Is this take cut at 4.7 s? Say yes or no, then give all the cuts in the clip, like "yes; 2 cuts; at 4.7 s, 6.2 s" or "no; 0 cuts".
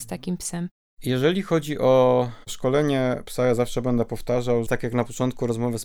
yes; 1 cut; at 4.7 s